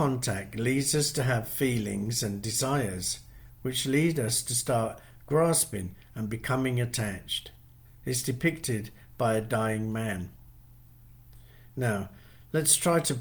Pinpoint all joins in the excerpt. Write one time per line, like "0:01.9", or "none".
0:07.9